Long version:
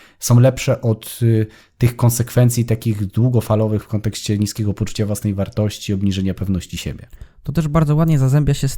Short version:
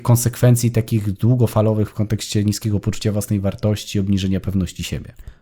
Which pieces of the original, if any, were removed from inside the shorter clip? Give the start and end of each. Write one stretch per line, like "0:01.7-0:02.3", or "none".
none